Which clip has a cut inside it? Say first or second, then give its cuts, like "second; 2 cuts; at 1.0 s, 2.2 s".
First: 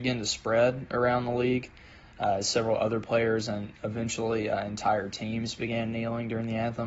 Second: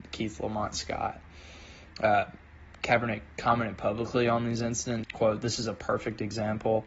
second; 1 cut; at 5.0 s